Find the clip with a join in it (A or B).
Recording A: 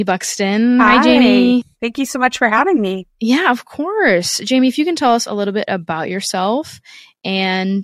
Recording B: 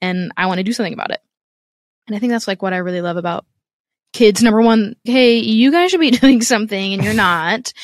B